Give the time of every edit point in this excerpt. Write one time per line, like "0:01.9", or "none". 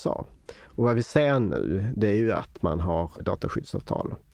0:03.2